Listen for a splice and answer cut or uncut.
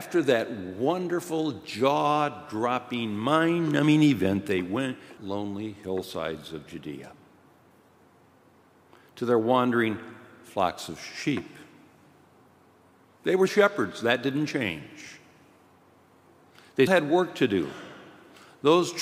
cut